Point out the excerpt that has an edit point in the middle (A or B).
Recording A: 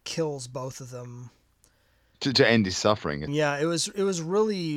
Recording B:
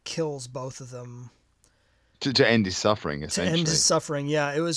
A